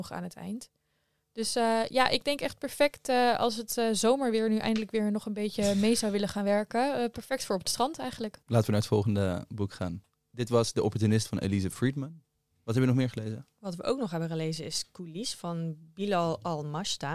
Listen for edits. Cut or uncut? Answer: cut